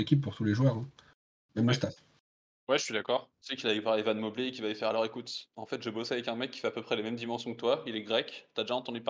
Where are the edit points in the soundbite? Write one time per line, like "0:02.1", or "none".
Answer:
0:03.3

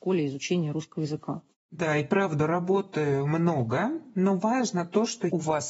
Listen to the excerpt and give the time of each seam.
none

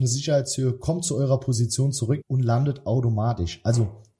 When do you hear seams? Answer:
0:02.2

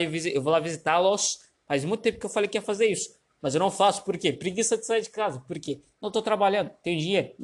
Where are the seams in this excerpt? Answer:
none

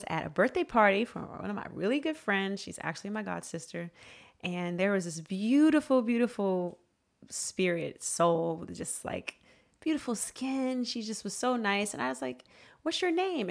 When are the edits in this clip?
none

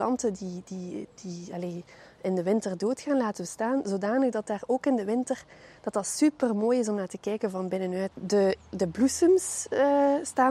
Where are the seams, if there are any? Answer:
0:08.1

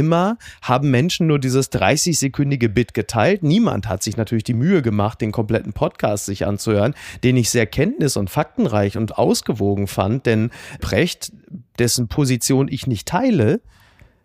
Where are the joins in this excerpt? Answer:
none

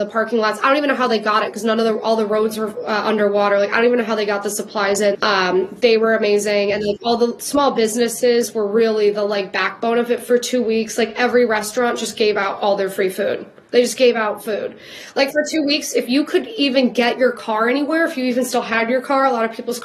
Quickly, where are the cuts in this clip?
0:05.1

